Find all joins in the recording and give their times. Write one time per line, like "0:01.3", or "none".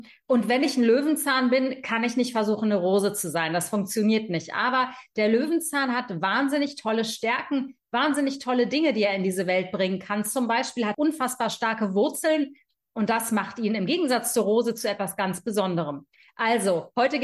0:10.9